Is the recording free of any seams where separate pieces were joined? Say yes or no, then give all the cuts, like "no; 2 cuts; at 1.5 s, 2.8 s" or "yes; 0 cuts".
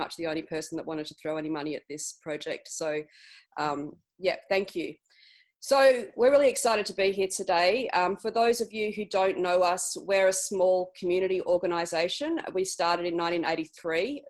yes; 0 cuts